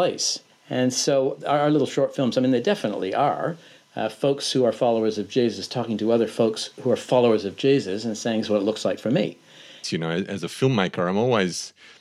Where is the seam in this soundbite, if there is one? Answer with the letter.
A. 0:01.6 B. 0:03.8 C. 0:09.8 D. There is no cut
C